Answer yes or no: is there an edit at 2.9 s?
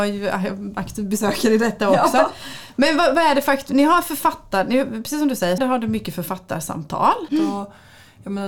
no